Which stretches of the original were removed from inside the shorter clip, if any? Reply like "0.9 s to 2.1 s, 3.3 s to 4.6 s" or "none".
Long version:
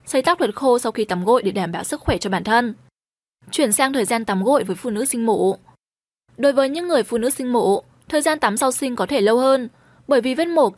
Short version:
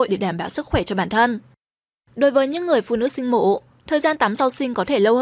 3.4 s to 6.3 s

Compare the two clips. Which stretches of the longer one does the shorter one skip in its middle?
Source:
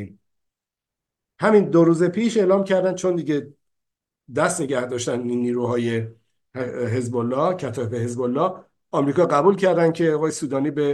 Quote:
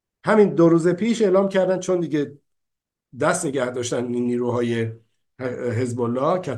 none

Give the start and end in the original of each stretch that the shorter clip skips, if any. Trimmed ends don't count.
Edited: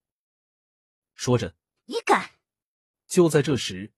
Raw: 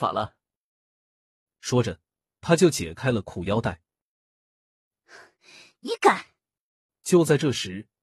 2.2 s to 5.7 s

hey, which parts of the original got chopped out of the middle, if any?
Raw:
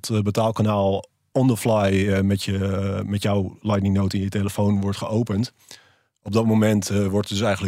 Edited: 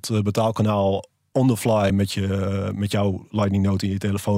1.9 s to 2.2 s

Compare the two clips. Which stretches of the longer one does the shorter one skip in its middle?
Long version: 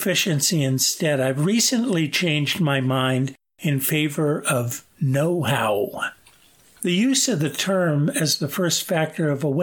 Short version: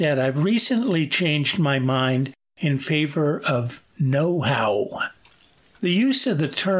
none

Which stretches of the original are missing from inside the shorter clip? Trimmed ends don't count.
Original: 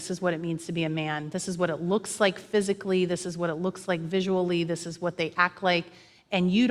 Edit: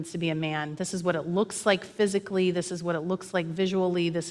none

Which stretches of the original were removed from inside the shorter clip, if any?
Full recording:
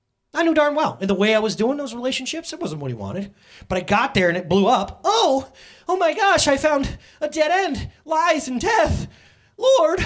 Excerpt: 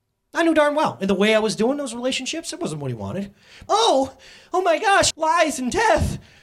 3.7 s to 5.0 s, 6.5 s to 8.0 s

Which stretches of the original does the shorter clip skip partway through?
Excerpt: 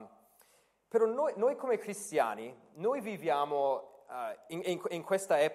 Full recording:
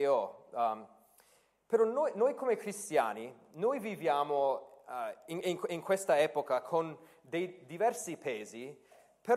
none

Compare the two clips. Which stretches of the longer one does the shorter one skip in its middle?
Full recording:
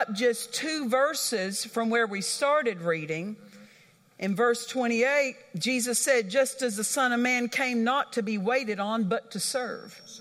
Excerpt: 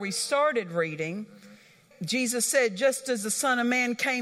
4.0 s to 5.4 s

